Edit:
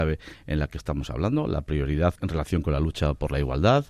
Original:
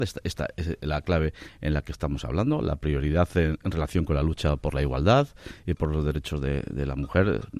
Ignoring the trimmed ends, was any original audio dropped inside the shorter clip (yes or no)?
yes